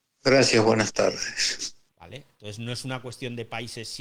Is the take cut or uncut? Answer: cut